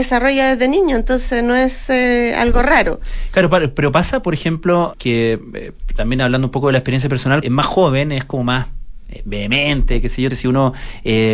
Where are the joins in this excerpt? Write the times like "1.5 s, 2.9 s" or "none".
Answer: 4.9 s, 7.4 s, 10.3 s